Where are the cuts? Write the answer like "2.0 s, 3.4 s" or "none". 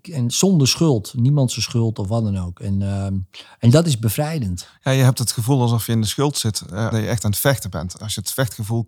6.9 s